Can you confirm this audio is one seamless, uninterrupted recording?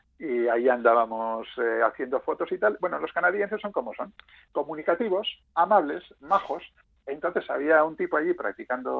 yes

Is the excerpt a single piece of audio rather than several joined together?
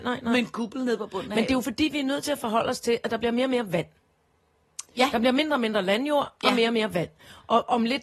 yes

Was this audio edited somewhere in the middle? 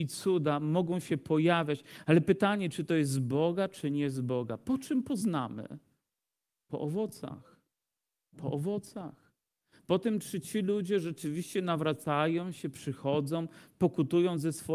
no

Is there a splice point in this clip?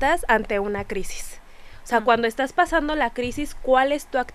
no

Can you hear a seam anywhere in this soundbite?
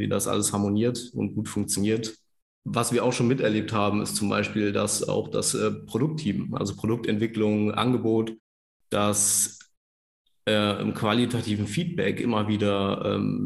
yes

